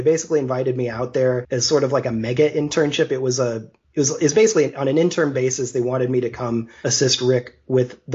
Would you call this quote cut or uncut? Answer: uncut